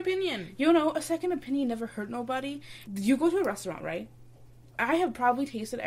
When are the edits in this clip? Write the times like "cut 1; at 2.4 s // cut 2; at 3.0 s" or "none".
cut 1; at 2.9 s // cut 2; at 4.7 s